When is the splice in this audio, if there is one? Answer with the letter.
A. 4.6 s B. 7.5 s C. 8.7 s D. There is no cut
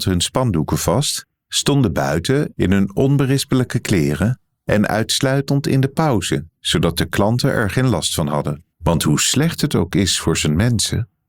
C